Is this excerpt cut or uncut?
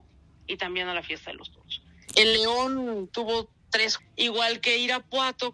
cut